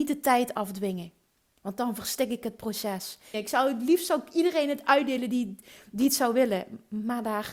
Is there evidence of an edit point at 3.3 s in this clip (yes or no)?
yes